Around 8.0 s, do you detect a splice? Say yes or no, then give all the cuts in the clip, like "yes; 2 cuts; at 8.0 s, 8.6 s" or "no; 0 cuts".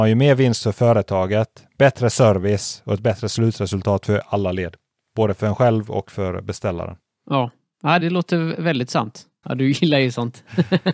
yes; 2 cuts; at 8.0 s, 9.4 s